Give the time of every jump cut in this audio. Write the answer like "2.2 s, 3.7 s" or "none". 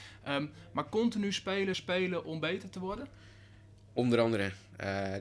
1.7 s

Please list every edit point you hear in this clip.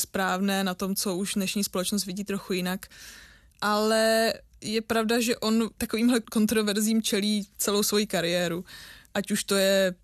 3.5 s

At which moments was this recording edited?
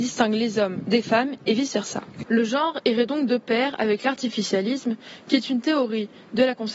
2.2 s

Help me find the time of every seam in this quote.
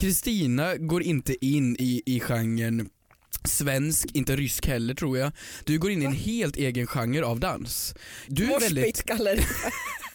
5.6 s, 8.3 s

